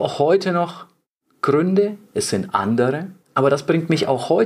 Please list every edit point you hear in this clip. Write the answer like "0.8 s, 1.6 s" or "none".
3.2 s